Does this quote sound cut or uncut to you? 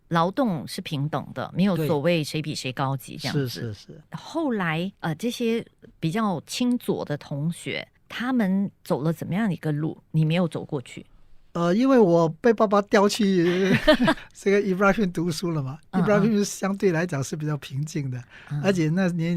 cut